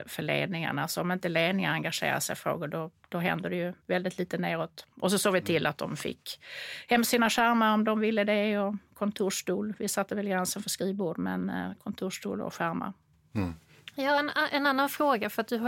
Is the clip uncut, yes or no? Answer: no